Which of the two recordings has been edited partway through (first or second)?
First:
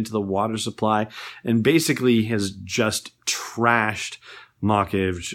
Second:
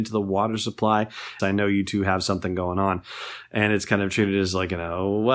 second